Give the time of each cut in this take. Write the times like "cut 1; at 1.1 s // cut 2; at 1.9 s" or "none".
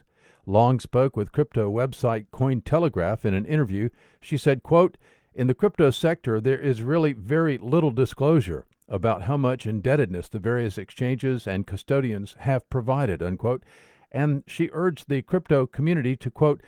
none